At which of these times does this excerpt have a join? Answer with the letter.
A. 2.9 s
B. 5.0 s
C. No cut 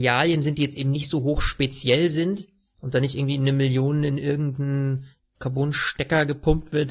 C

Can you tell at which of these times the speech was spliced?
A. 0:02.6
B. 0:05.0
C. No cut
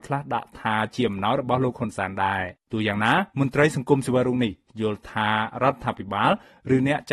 A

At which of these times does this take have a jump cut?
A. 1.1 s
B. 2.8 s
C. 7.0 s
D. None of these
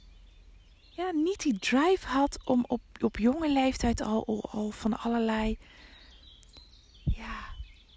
D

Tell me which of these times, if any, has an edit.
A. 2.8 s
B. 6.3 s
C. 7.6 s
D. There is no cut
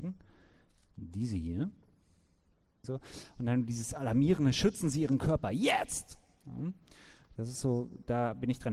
A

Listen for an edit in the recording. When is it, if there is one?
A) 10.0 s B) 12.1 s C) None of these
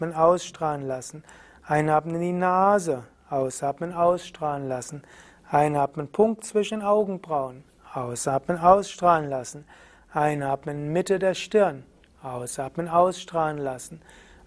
C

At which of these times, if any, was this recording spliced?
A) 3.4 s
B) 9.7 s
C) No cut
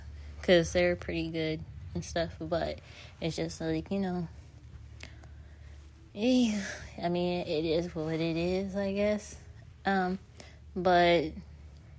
C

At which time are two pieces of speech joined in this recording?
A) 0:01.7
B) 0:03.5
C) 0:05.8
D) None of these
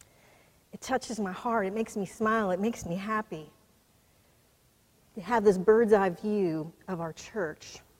D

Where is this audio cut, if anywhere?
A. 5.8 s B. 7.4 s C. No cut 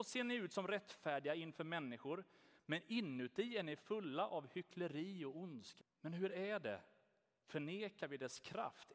A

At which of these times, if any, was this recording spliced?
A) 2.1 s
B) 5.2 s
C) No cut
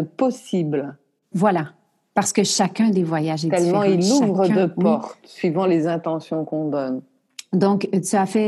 C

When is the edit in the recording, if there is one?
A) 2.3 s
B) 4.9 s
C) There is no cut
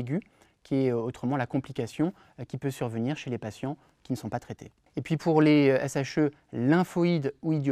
C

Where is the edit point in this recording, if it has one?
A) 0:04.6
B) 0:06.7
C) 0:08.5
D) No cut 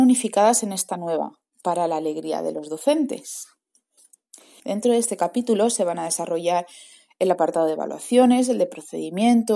A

